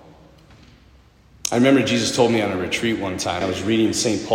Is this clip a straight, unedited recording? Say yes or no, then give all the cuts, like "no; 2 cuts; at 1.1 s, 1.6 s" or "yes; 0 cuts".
no; 1 cut; at 3.4 s